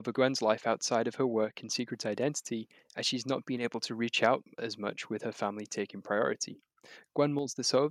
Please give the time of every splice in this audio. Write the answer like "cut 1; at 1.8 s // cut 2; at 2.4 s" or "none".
none